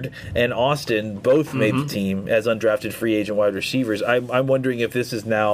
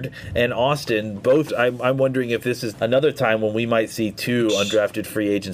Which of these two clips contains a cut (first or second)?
second